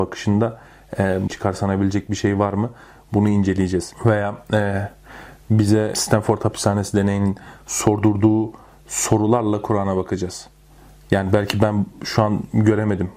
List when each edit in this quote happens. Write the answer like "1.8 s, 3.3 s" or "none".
1.3 s